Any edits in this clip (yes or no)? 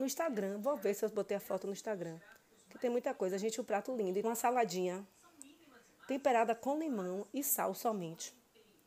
yes